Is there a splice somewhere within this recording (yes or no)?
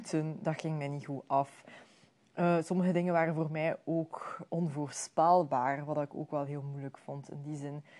yes